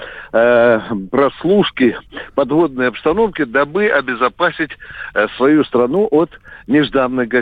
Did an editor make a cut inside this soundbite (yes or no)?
no